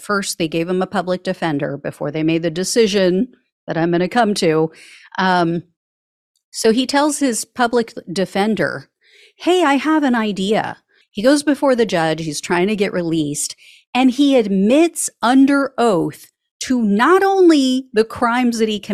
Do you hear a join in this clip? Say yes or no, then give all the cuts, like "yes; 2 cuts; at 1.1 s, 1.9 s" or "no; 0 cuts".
yes; 1 cut; at 11.0 s